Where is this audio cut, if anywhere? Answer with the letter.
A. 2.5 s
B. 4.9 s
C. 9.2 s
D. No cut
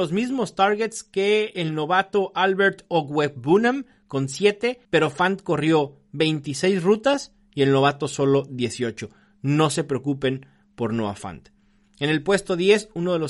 B